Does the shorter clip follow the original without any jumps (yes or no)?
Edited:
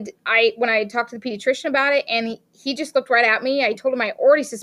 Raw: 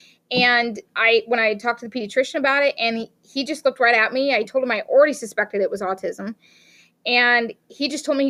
yes